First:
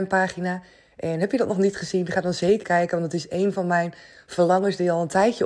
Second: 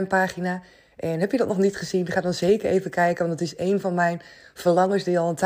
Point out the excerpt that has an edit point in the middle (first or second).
first